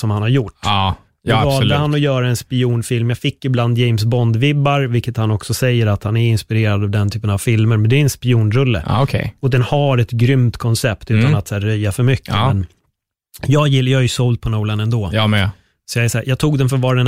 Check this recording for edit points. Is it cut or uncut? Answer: uncut